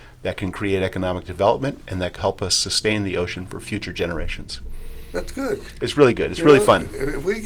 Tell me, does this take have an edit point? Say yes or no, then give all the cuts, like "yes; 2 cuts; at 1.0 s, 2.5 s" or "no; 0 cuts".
yes; 1 cut; at 2.2 s